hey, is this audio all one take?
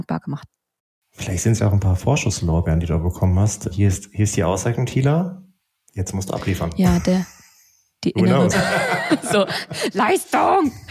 no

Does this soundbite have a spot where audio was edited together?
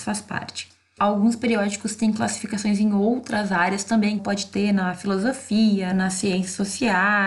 yes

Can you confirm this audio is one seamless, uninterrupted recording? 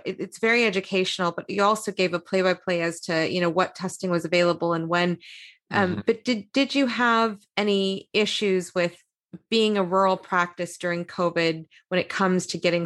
yes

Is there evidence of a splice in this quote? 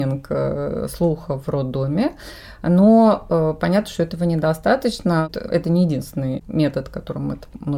no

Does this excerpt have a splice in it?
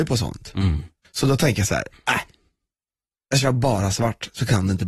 yes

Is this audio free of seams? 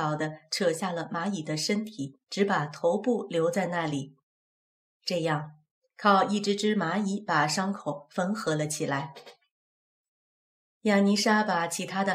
yes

